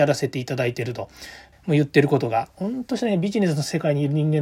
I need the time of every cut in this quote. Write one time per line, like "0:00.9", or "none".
0:01.5